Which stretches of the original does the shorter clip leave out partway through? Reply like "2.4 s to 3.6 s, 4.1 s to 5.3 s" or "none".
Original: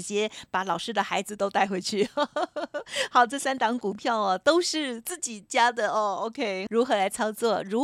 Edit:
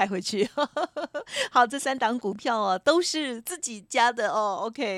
none

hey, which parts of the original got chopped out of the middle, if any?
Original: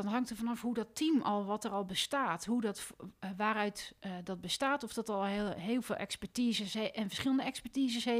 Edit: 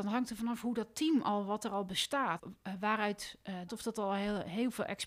2.4 s to 2.9 s, 4.3 s to 4.8 s

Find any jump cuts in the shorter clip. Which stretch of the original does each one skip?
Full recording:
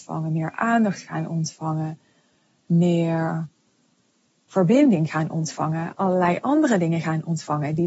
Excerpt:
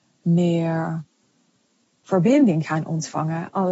none

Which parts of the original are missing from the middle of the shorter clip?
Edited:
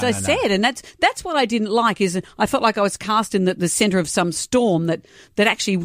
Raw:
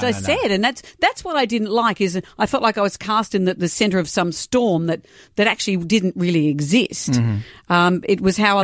none

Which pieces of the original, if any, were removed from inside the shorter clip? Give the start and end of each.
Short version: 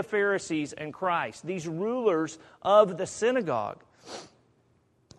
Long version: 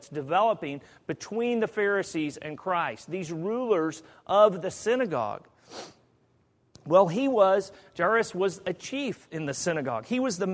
none

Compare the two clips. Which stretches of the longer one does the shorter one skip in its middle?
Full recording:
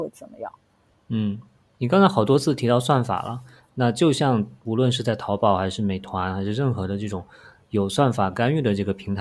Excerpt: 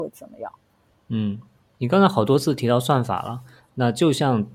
none

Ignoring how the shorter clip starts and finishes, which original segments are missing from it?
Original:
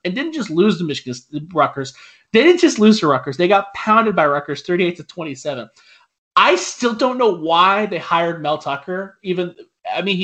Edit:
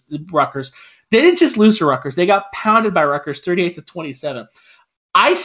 none

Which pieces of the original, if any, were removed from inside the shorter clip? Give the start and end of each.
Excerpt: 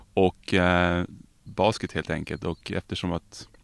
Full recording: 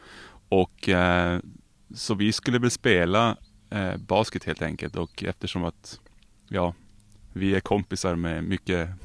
1.8 s to 4.0 s

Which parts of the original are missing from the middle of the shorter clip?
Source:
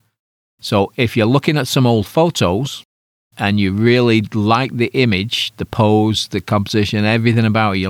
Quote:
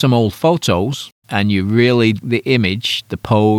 2.9 s to 3.3 s, 4.3 s to 4.7 s

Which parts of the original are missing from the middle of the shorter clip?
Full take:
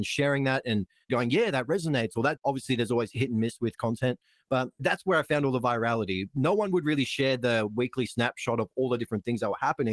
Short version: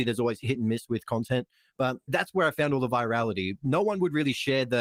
none

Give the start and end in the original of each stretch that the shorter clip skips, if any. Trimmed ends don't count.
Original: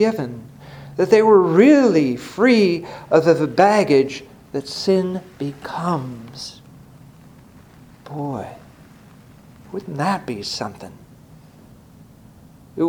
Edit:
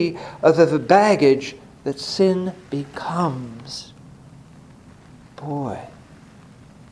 none

